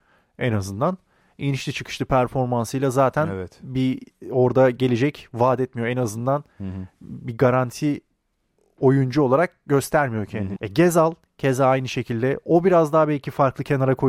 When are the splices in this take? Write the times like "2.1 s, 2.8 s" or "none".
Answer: 10.6 s